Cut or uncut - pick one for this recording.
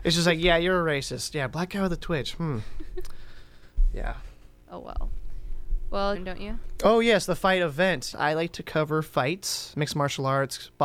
cut